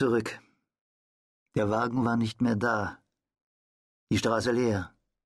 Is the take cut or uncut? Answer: uncut